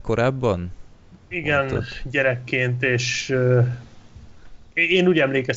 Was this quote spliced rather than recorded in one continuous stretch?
yes; 1 cut; at 1.3 s

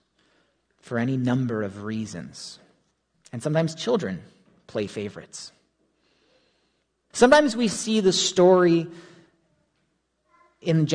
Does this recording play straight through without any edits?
no; 2 cuts; at 3.1 s, 7.1 s

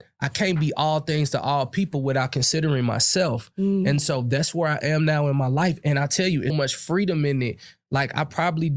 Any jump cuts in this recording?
yes; 1 cut; at 6.5 s

